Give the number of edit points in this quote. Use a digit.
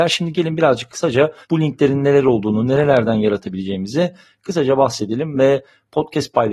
1